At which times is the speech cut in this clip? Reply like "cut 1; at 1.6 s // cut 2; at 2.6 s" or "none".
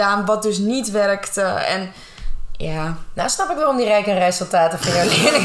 none